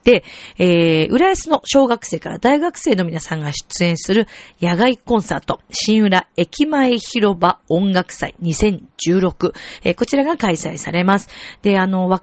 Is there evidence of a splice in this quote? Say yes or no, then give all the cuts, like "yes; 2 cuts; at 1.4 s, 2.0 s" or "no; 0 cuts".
no; 0 cuts